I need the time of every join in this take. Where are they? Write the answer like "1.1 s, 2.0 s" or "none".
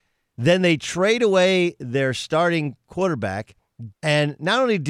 3.9 s

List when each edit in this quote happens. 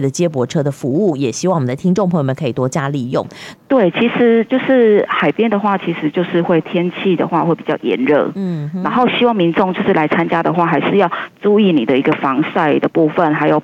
3.5 s

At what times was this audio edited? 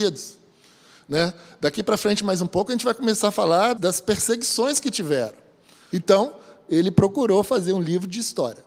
3.8 s, 5.9 s

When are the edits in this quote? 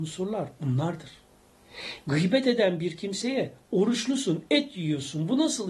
none

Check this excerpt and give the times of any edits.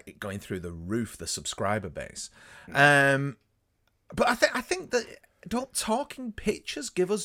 none

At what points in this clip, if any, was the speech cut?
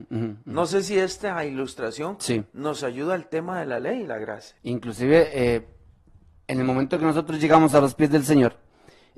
4.6 s

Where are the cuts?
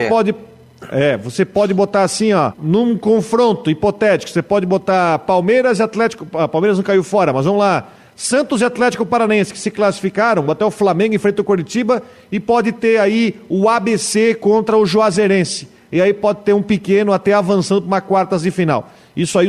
2.5 s

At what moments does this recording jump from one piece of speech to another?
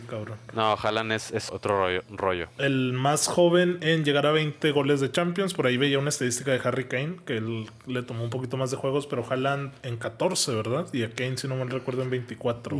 1.5 s

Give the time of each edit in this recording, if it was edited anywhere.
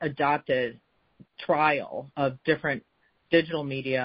2.1 s

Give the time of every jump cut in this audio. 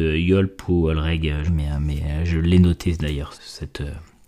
1.5 s, 3.3 s

